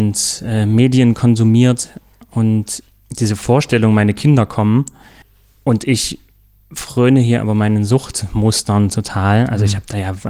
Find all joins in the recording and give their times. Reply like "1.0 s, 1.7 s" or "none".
none